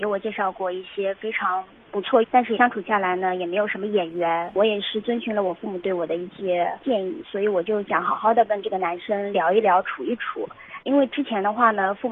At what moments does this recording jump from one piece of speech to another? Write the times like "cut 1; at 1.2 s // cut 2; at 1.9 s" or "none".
cut 1; at 2.2 s // cut 2; at 4.5 s // cut 3; at 10.8 s